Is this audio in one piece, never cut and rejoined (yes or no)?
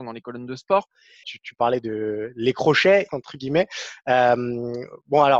no